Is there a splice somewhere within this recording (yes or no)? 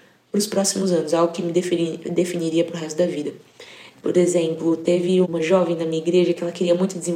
yes